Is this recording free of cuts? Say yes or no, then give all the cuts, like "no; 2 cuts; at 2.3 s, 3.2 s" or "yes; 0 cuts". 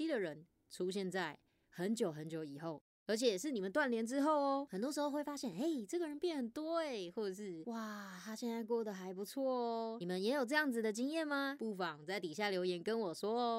yes; 0 cuts